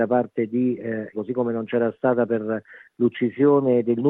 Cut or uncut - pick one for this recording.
cut